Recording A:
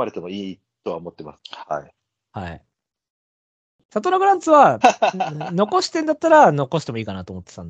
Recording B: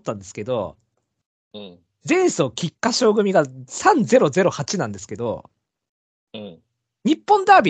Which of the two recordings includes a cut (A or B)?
A